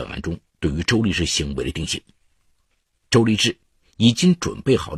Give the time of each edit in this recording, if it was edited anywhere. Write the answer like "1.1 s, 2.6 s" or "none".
3.1 s